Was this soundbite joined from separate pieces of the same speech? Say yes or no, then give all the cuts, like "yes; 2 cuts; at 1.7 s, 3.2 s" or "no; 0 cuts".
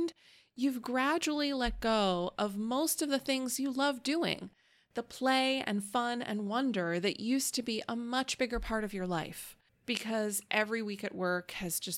yes; 1 cut; at 9.7 s